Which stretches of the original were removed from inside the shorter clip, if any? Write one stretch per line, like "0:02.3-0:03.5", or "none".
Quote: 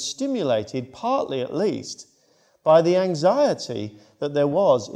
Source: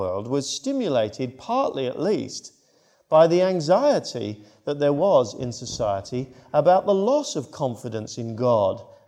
none